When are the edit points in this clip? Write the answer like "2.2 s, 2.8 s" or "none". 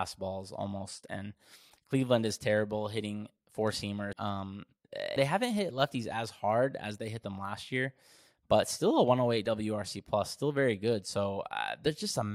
4.1 s, 5.2 s